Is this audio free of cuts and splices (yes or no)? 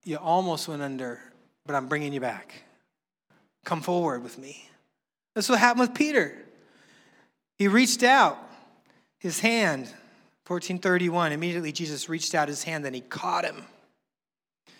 yes